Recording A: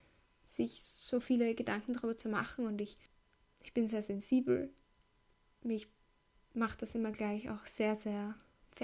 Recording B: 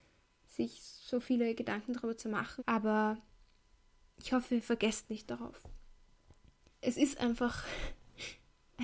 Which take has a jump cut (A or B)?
B